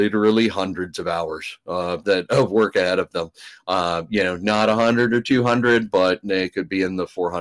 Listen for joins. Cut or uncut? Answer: cut